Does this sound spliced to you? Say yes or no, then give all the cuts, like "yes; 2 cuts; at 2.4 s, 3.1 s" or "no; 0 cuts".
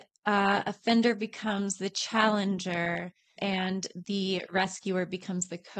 yes; 1 cut; at 3.4 s